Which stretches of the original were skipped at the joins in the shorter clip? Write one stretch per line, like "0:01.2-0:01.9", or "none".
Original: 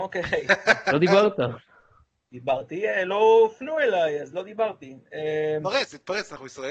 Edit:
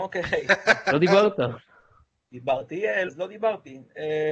0:03.1-0:04.2